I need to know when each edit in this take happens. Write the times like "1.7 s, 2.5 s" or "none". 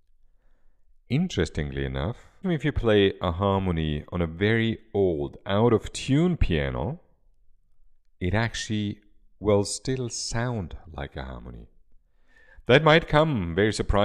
2.4 s